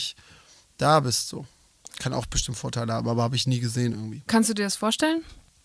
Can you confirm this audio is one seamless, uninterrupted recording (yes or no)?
yes